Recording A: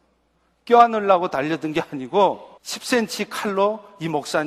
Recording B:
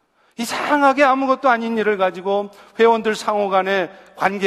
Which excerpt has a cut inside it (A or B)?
A